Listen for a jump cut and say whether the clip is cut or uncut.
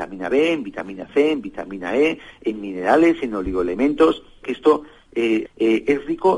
cut